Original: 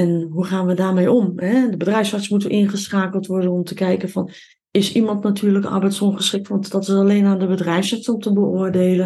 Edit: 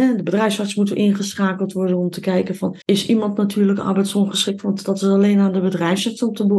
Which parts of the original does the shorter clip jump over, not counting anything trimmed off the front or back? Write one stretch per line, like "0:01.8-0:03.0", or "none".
0:04.4-0:04.7